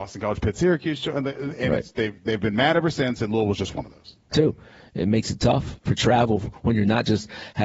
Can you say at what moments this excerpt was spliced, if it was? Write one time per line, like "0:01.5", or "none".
0:04.3